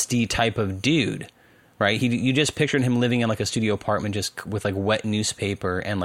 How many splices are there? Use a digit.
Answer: 0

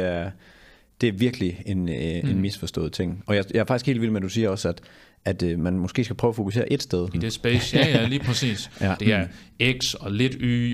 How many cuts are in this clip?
2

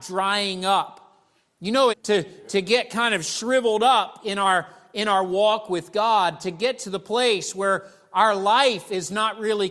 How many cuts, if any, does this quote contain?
1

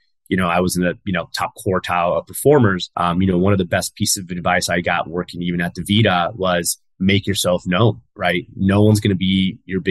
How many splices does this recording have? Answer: 2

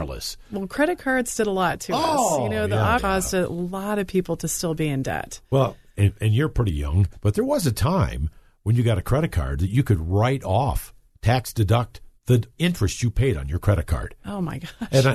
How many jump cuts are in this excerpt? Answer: 1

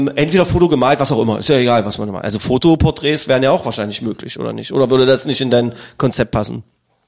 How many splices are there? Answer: 0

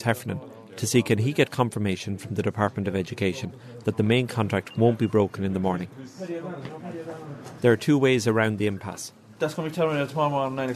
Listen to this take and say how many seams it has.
2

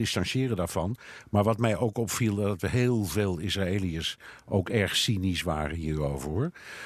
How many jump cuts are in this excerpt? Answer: 0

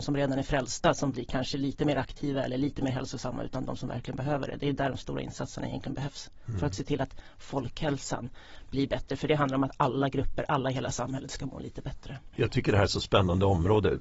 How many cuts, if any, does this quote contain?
0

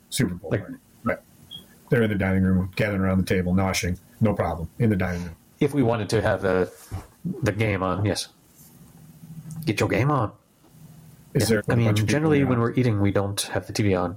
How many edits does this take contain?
2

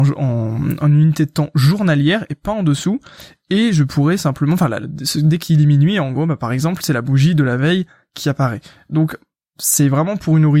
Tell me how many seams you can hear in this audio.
1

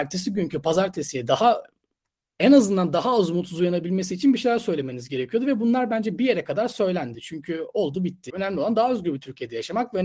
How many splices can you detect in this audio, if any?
2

